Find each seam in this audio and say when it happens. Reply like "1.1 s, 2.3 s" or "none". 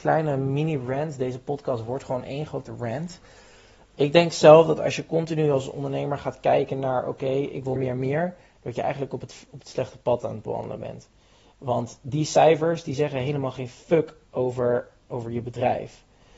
7.8 s